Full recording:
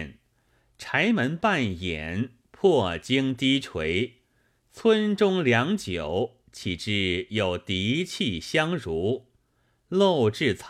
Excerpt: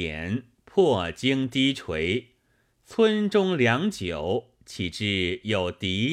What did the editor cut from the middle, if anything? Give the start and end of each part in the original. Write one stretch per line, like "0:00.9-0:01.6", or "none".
none